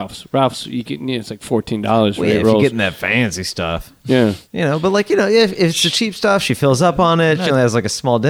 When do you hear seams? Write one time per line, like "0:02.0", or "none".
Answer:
0:04.5

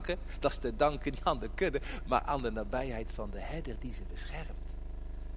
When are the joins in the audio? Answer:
none

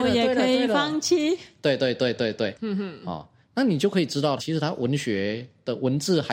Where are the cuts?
0:02.5
0:04.4

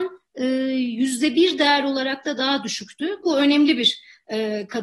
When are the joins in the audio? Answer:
0:03.2

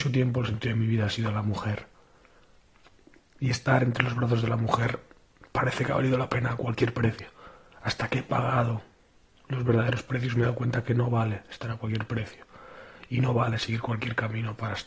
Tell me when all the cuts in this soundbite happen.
none

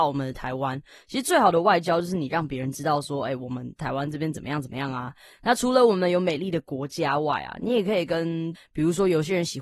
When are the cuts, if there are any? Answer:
0:08.5

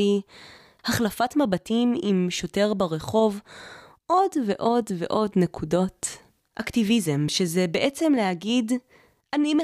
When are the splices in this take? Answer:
0:06.4

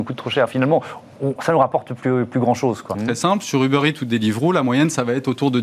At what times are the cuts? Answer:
0:01.4
0:02.9

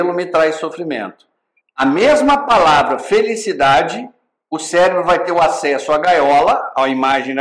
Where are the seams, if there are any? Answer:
0:01.6

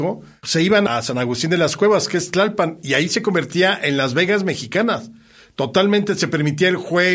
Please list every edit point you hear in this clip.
none

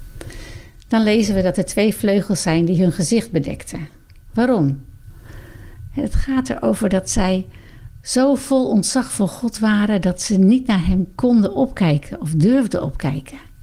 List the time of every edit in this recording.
none

